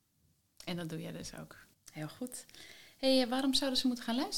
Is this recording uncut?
no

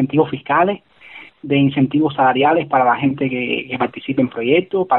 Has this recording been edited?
no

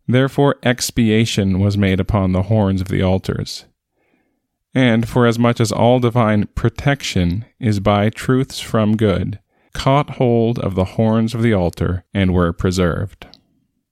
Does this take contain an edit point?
yes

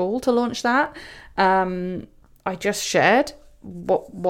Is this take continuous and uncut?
yes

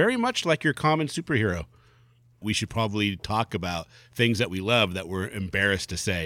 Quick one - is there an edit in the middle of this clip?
yes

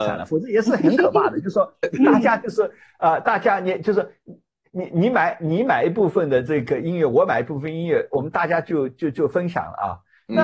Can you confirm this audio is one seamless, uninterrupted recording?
yes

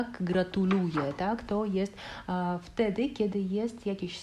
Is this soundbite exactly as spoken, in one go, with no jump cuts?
yes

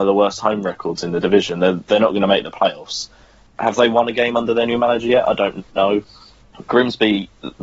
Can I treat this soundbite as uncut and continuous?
yes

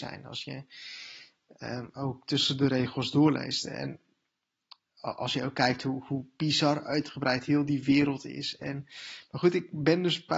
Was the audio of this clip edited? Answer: no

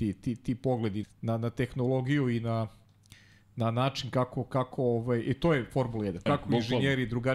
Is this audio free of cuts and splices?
no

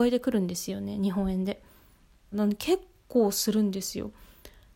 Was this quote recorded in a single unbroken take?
no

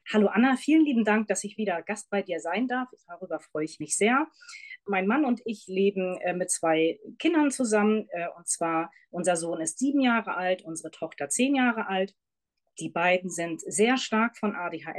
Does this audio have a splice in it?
no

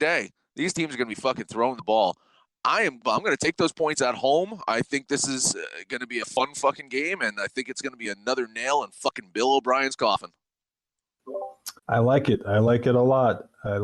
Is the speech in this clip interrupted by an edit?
yes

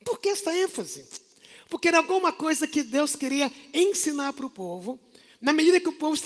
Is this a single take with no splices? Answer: yes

